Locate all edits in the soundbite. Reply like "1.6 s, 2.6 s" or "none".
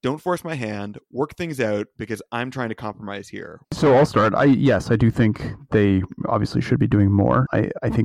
3.6 s